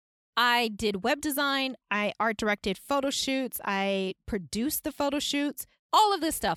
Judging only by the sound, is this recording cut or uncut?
uncut